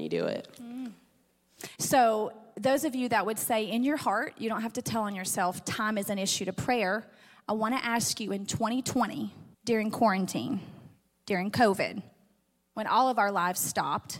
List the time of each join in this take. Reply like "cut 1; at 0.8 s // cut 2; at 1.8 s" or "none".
cut 1; at 1.7 s // cut 2; at 9.5 s

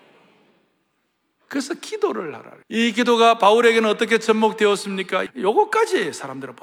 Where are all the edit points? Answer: cut 1; at 2.6 s // cut 2; at 5.3 s

